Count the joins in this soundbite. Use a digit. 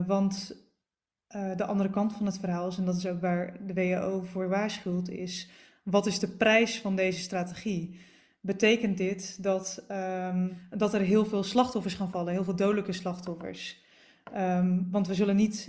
0